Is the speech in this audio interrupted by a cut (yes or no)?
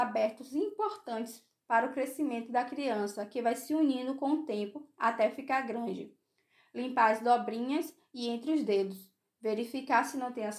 no